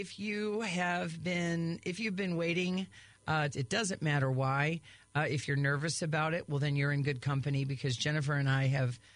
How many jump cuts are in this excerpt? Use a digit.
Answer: 1